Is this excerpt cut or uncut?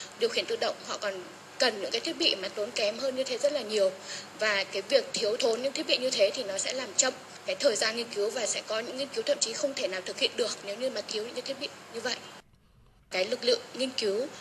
cut